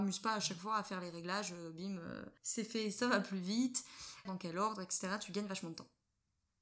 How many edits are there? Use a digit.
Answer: 2